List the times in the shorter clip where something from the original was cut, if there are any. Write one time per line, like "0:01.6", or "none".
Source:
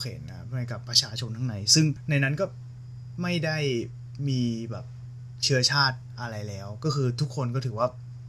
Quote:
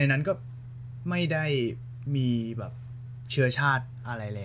none